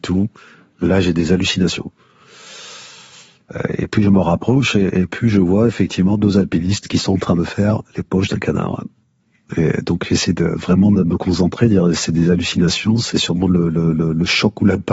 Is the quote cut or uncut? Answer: uncut